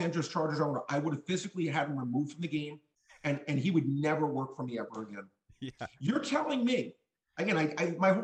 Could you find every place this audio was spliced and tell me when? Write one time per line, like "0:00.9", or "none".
none